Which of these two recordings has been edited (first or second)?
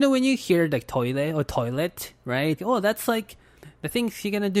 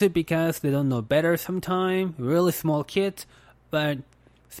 first